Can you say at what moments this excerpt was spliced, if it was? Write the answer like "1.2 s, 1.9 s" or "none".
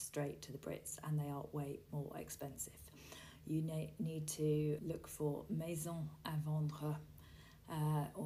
4.8 s